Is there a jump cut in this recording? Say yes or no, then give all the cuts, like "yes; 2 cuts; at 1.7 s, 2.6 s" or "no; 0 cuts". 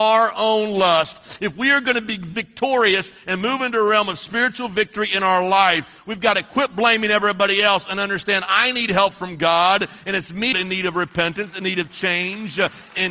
yes; 1 cut; at 10.5 s